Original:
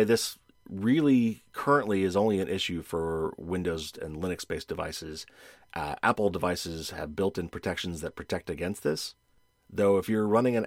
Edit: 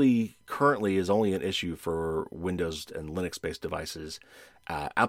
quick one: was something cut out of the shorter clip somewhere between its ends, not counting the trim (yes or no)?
no